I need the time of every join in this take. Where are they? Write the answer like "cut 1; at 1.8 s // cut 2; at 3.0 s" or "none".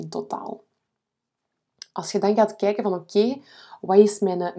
none